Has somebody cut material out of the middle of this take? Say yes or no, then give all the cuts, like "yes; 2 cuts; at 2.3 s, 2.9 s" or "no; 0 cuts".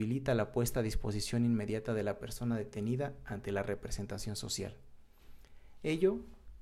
no; 0 cuts